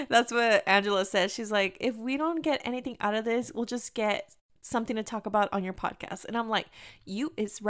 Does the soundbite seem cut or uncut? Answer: uncut